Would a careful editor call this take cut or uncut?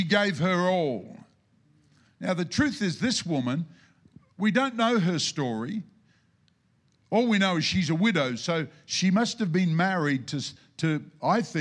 uncut